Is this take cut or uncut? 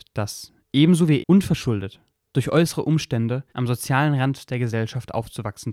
cut